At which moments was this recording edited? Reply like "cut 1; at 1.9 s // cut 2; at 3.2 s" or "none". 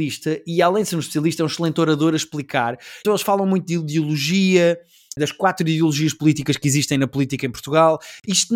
cut 1; at 3.0 s // cut 2; at 5.2 s